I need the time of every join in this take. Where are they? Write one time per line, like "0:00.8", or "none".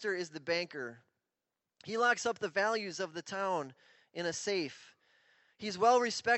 none